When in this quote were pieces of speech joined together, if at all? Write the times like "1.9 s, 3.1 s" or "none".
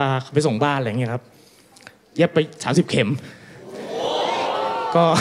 none